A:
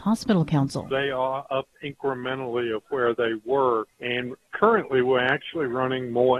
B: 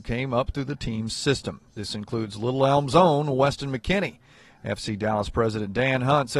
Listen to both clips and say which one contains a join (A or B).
A